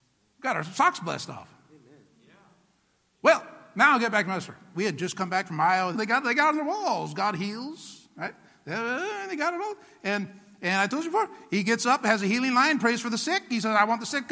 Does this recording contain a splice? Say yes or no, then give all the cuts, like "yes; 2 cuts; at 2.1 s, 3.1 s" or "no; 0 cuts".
yes; 2 cuts; at 4.7 s, 5.9 s